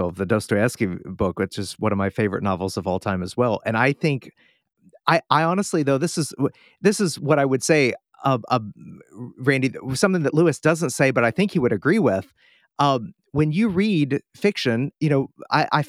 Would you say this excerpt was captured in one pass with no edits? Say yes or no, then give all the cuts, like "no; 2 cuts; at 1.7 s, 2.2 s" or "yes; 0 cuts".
no; 1 cut; at 14.9 s